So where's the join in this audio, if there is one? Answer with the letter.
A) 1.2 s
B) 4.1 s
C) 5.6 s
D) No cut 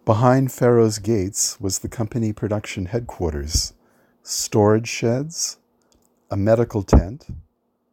B